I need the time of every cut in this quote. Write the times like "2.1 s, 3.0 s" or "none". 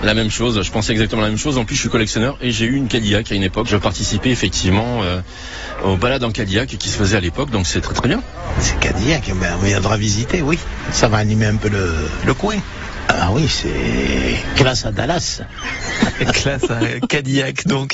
3.6 s